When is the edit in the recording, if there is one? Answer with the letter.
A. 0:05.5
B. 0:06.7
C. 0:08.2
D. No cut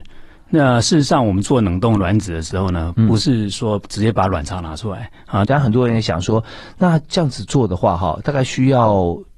A